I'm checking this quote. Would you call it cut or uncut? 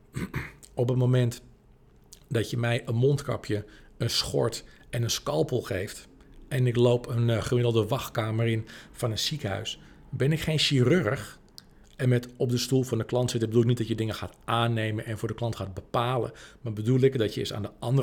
cut